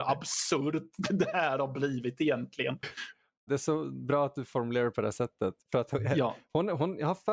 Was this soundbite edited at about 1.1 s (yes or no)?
no